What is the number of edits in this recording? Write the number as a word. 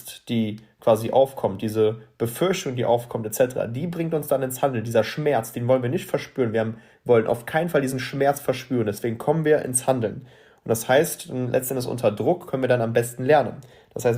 zero